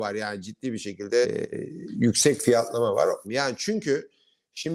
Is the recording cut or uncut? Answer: cut